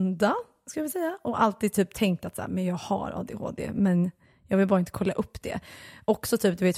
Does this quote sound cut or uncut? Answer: uncut